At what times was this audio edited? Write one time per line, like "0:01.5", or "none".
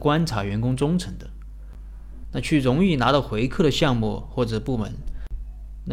0:02.2

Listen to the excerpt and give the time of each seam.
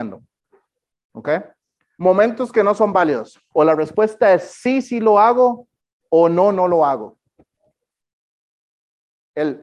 0:02.0
0:03.5

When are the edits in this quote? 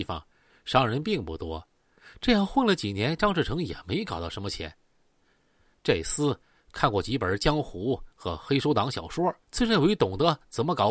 0:05.7
0:09.4

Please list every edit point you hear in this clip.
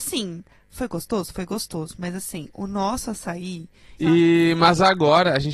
0:04.0

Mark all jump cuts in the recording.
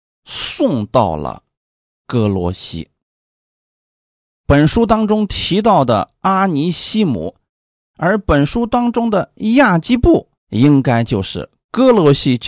0:07.8
0:10.4

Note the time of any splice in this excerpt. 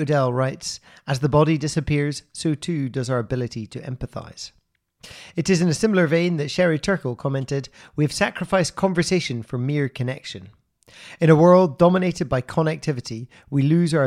none

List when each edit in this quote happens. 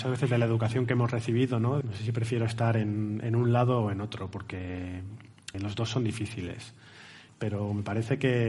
0:01.8
0:05.5
0:07.3

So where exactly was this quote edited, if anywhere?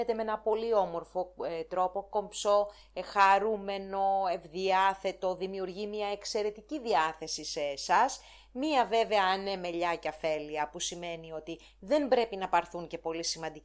none

